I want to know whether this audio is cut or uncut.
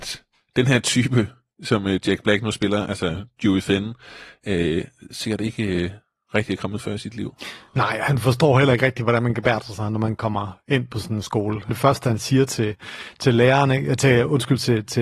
cut